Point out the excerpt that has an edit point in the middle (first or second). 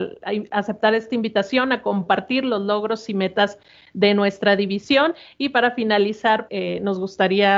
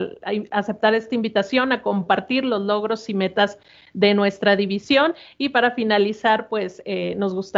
first